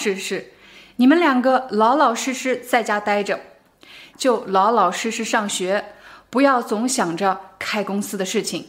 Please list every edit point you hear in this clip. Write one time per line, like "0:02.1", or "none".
0:04.1